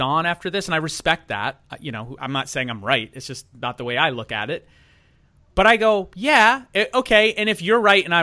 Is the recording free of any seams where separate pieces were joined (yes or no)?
yes